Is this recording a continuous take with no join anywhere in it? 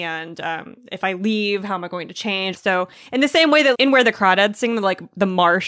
no; 2 cuts; at 2.5 s, 3.7 s

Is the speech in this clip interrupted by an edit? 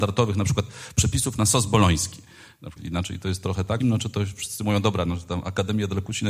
yes; 2 cuts; at 2.8 s, 3.8 s

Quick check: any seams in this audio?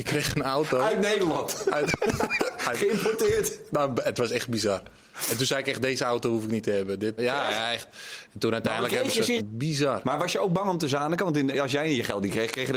yes; 2 cuts; at 7.2 s, 9.4 s

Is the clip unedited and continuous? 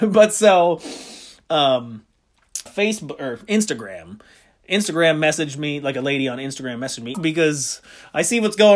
no; 2 cuts; at 2.7 s, 7.1 s

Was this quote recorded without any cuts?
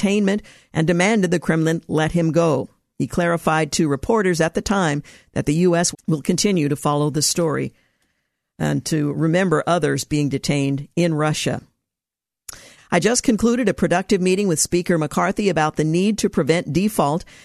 no; 2 cuts; at 5.9 s, 12.8 s

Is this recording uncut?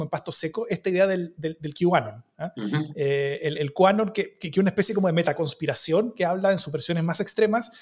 yes; 0 cuts

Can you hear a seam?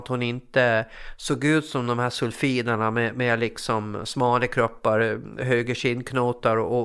no; 0 cuts

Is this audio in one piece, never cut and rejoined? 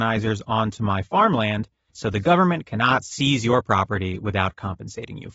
no; 1 cut; at 1.9 s

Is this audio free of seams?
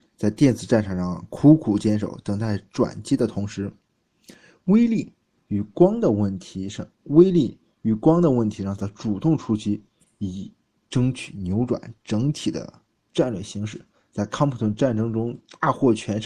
yes; 0 cuts

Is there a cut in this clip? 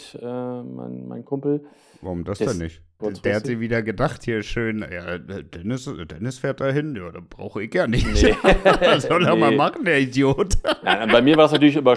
yes; 1 cut; at 3.0 s

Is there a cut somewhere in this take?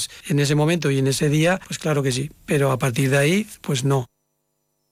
no; 0 cuts

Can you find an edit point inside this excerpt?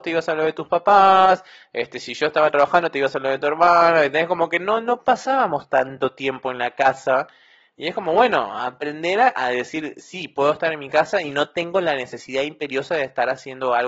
no; 0 cuts

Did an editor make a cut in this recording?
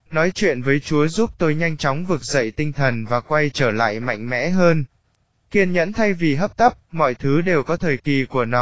no; 0 cuts

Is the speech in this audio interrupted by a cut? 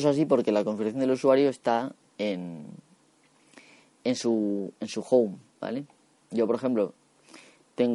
no; 0 cuts

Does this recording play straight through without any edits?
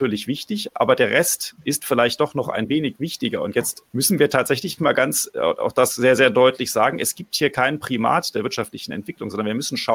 no; 1 cut; at 3.9 s

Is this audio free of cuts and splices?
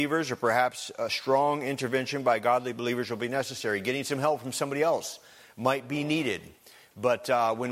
yes; 0 cuts

